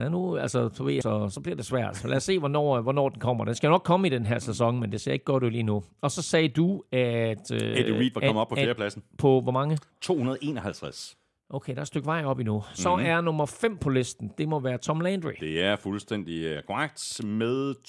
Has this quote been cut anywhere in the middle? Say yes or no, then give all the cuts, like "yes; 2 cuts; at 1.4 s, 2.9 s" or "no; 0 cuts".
yes; 1 cut; at 1.0 s